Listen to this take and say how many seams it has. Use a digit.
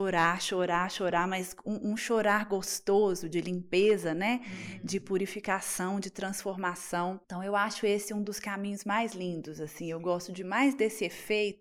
1